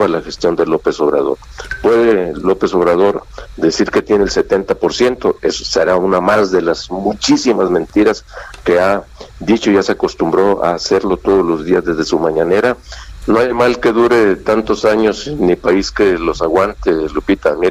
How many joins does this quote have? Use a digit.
1